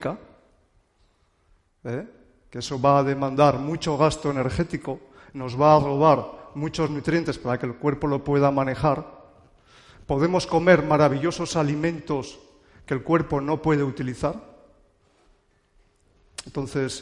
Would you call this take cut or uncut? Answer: uncut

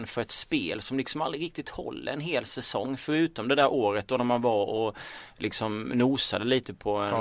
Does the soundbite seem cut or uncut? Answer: uncut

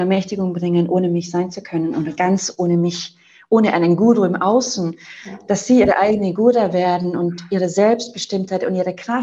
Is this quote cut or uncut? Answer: uncut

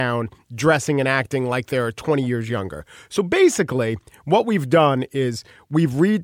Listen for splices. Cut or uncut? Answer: uncut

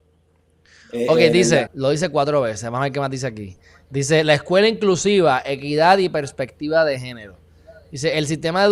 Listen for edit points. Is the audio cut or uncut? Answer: cut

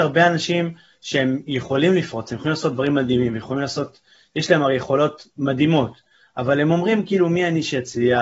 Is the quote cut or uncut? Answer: cut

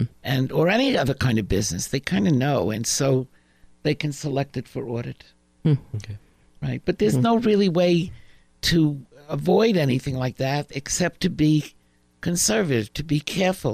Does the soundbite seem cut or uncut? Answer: uncut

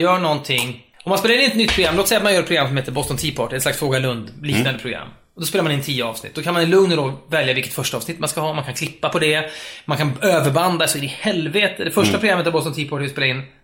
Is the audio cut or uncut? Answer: cut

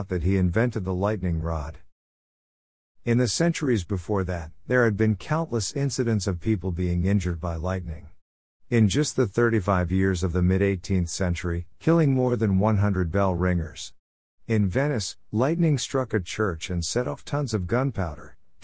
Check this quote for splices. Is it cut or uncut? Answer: cut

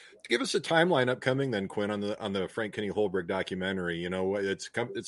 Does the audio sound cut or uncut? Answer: uncut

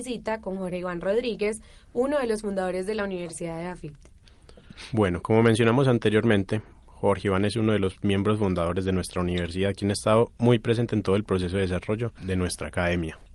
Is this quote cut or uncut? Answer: uncut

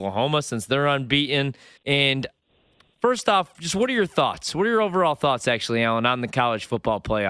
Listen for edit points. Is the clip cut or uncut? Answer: cut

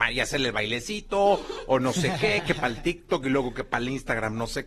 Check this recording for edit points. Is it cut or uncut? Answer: uncut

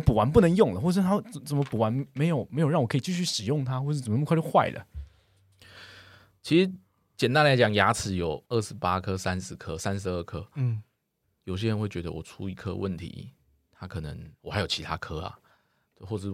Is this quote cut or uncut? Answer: cut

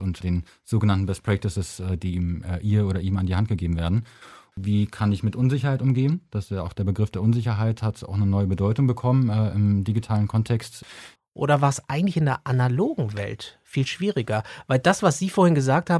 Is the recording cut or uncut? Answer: cut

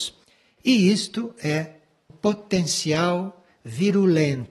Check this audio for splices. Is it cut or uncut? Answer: cut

